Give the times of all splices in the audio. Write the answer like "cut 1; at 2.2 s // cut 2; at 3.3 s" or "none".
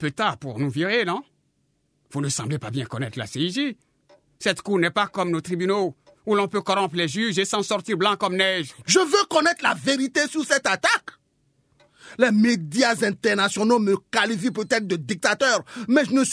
cut 1; at 8.9 s